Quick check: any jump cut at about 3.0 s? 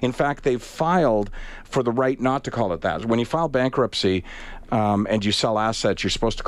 no; 0 cuts

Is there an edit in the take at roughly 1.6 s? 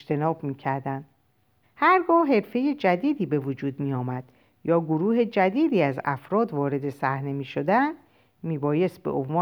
yes; 1 cut; at 1.6 s

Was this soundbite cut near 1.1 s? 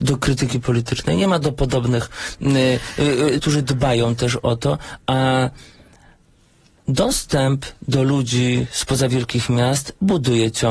no; 1 cut; at 3.4 s

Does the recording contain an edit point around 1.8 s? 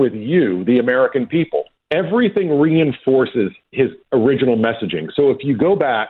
yes; 1 cut; at 1.8 s

